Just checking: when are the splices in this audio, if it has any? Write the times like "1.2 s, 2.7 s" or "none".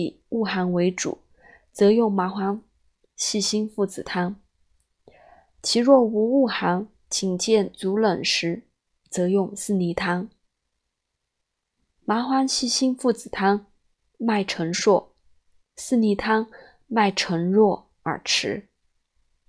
none